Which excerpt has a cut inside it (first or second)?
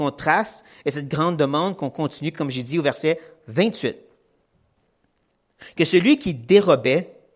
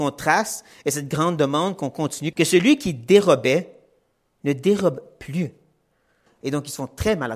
second